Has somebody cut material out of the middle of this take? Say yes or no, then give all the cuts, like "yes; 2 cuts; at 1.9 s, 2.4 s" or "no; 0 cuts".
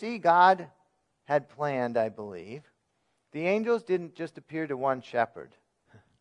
no; 0 cuts